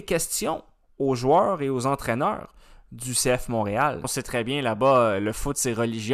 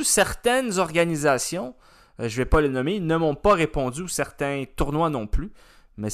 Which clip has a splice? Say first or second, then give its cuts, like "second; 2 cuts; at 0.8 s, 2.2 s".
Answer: first; 1 cut; at 4.0 s